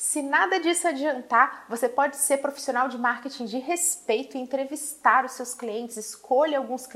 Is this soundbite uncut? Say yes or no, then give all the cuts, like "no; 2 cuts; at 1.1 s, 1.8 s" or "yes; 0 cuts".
yes; 0 cuts